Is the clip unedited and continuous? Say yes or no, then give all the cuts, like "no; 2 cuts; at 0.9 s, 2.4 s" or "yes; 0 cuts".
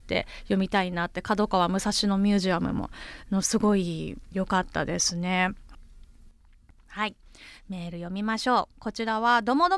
yes; 0 cuts